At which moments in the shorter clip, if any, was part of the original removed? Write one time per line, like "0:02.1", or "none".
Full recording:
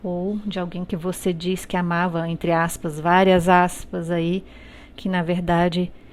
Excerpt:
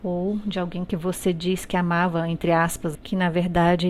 0:02.9